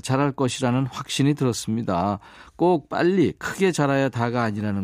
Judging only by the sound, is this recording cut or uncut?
uncut